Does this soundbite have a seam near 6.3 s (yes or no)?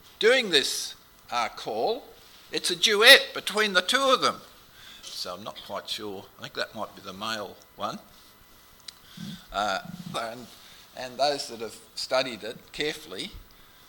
no